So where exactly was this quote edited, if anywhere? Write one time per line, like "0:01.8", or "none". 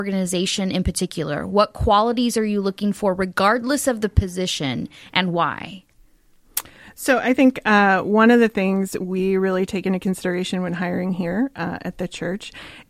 none